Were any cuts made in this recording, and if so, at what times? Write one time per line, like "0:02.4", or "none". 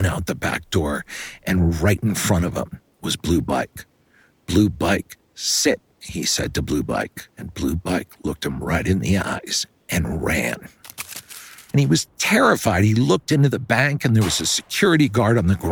0:07.3
0:11.7